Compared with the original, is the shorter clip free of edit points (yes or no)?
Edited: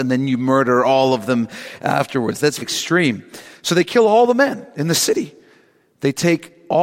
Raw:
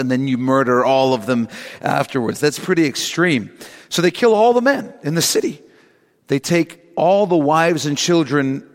no